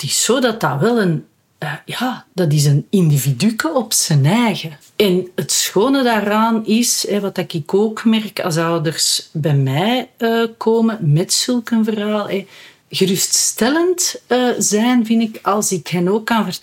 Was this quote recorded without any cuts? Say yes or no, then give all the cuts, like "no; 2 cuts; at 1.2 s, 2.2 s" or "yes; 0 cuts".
no; 2 cuts; at 4.8 s, 12.8 s